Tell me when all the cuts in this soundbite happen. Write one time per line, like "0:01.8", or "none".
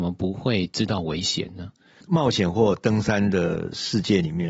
0:02.0